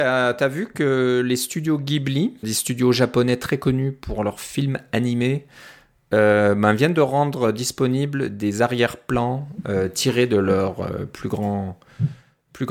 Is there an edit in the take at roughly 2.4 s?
yes; 1 cut; at 2.4 s

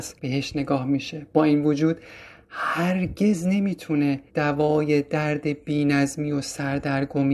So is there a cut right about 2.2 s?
no; 1 cut; at 4.3 s

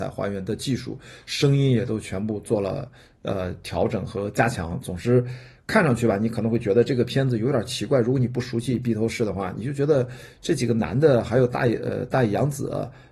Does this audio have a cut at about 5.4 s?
no; 0 cuts

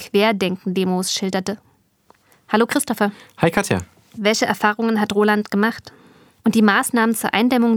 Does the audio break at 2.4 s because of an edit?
no; 2 cuts; at 4.2 s, 6.4 s

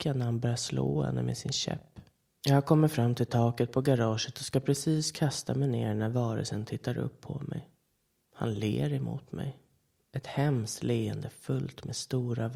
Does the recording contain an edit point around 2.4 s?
yes; 1 cut; at 2.4 s

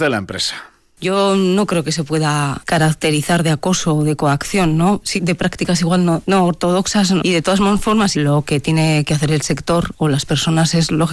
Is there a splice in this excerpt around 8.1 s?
yes; 2 cuts; at 5.2 s, 8.1 s

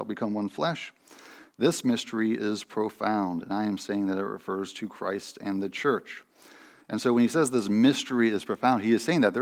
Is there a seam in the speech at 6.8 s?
yes; 1 cut; at 6.8 s

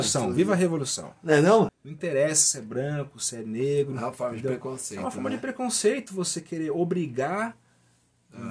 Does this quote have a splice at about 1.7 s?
yes; 1 cut; at 1.7 s

